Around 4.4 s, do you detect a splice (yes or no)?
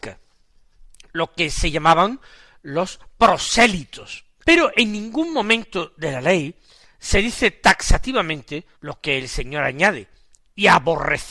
yes